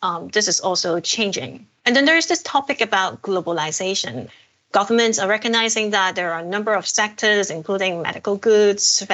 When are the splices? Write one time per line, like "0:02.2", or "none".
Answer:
0:01.8